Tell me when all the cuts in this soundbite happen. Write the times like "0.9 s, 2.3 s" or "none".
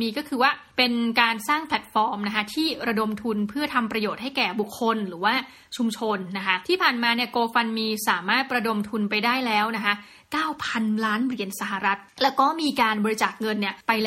none